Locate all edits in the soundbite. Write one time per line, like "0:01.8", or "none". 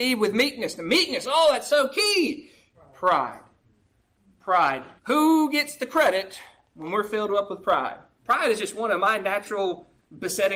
0:02.7
0:05.0
0:08.2